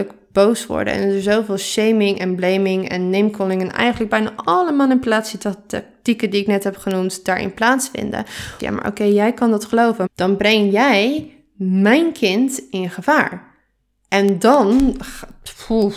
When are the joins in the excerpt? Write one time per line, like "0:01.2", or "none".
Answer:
0:08.6
0:10.1